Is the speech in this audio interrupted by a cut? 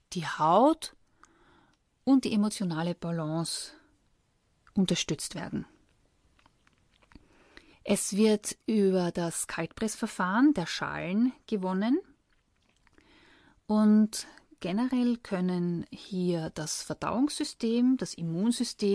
yes; 1 cut; at 7.7 s

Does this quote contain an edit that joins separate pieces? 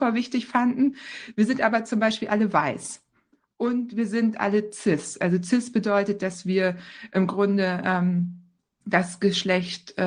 no; 0 cuts

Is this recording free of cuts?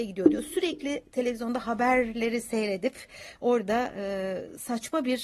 yes; 0 cuts

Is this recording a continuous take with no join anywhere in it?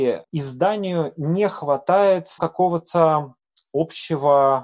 no; 1 cut; at 2.4 s

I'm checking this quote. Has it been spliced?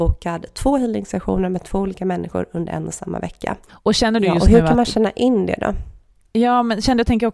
yes; 1 cut; at 3.7 s

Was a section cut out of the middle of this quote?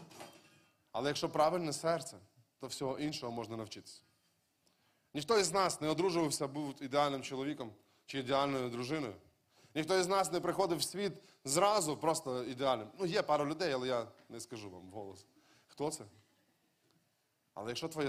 no; 0 cuts

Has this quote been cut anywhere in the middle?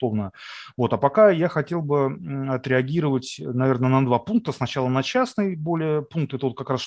no; 0 cuts

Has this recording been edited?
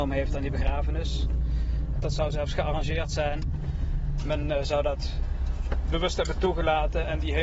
yes; 1 cut; at 1.9 s

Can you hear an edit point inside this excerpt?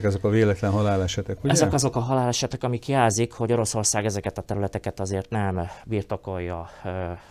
no; 0 cuts

